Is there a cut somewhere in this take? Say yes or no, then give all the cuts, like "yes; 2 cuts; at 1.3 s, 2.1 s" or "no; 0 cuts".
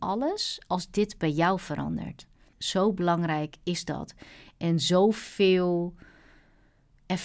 yes; 1 cut; at 2.5 s